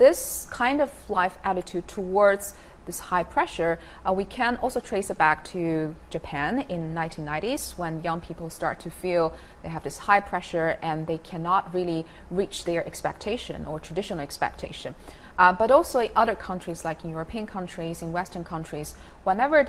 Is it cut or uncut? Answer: uncut